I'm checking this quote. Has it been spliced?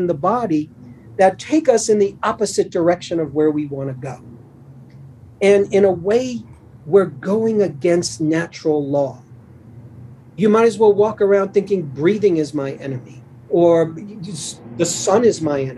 no; 0 cuts

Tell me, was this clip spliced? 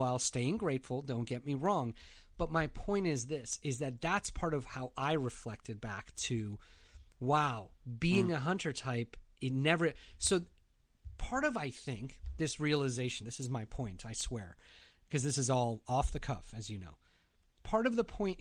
no; 0 cuts

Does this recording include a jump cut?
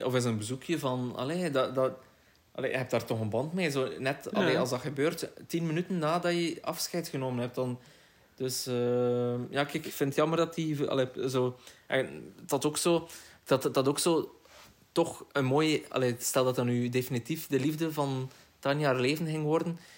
no; 0 cuts

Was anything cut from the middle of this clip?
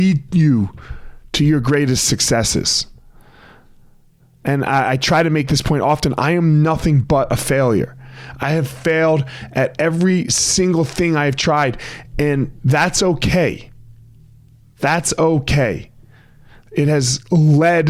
no; 0 cuts

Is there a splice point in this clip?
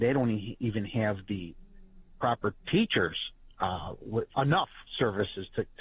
yes; 2 cuts; at 2.6 s, 4.3 s

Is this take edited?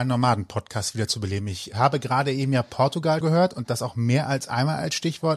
yes; 1 cut; at 3.2 s

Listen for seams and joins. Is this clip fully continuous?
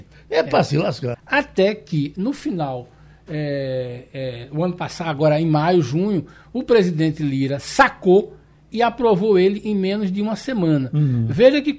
no; 1 cut; at 1.1 s

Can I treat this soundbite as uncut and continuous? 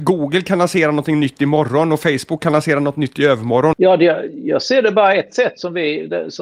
no; 1 cut; at 3.7 s

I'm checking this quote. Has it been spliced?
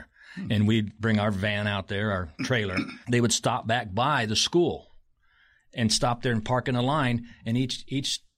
yes; 1 cut; at 3.0 s

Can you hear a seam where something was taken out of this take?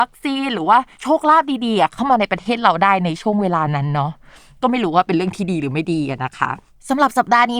no; 0 cuts

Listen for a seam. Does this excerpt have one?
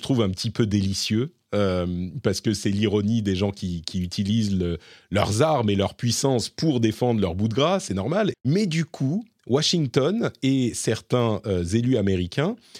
yes; 1 cut; at 8.3 s

